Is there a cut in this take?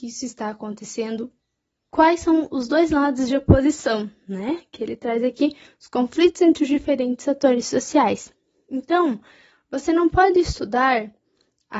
no; 0 cuts

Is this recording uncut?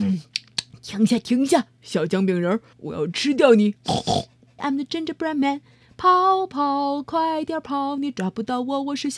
no; 2 cuts; at 2.7 s, 4.6 s

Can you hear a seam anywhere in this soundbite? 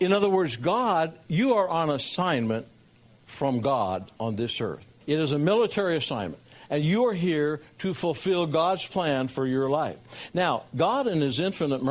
yes; 1 cut; at 5.0 s

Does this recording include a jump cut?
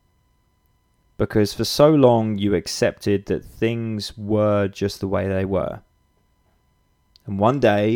no; 0 cuts

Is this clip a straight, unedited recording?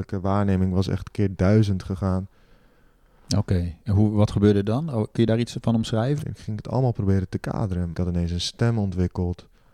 no; 2 cuts; at 6.2 s, 7.9 s

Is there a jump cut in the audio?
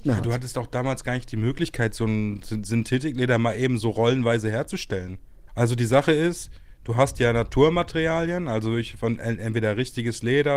yes; 1 cut; at 5.5 s

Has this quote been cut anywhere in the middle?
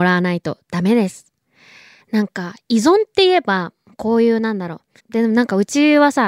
yes; 2 cuts; at 2.0 s, 5.0 s

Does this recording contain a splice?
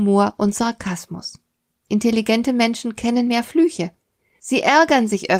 yes; 1 cut; at 1.8 s

